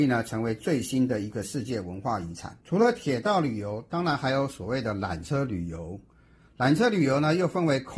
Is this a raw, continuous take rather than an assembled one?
no; 1 cut; at 2.6 s

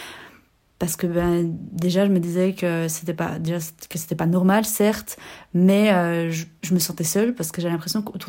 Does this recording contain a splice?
no; 0 cuts

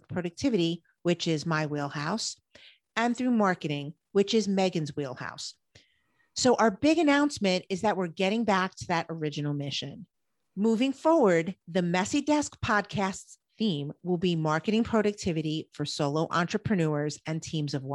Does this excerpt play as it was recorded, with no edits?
yes; 0 cuts

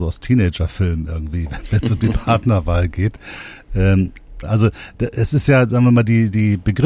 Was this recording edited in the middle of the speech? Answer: yes; 1 cut; at 4.4 s

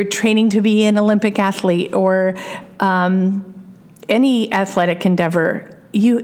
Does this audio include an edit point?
no; 0 cuts

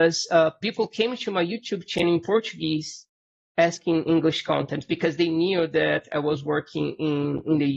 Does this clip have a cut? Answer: no; 0 cuts

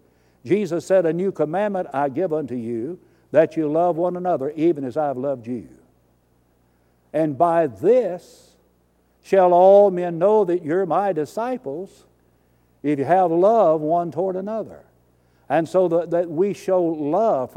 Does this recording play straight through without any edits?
yes; 0 cuts

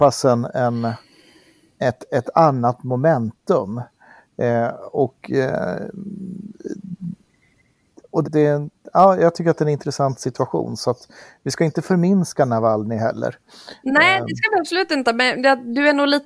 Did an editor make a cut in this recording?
yes; 1 cut; at 8.2 s

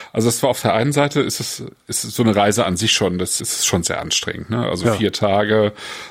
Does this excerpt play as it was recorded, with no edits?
no; 1 cut; at 3.4 s

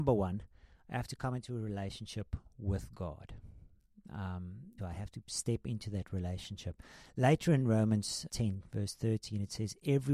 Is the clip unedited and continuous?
no; 2 cuts; at 4.8 s, 8.3 s

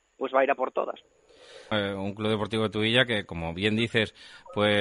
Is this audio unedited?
no; 1 cut; at 1.7 s

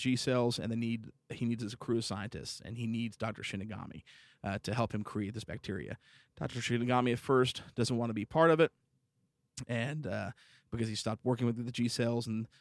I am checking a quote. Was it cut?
no; 0 cuts

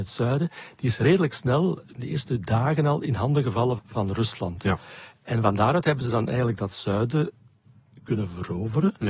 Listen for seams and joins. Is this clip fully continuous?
no; 1 cut; at 3.8 s

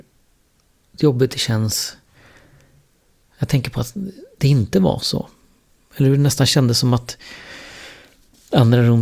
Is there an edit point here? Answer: no; 0 cuts

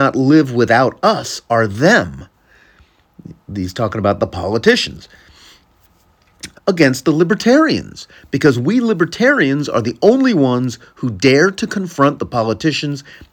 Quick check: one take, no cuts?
no; 1 cut; at 6.5 s

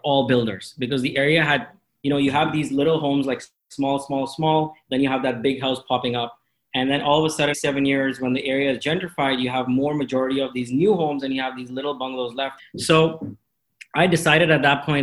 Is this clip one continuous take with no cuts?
no; 2 cuts; at 7.5 s, 12.6 s

